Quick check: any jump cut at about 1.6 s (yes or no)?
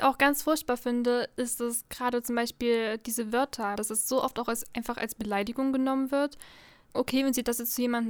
no